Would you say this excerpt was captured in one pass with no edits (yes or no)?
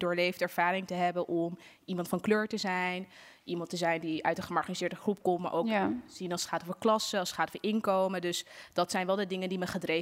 yes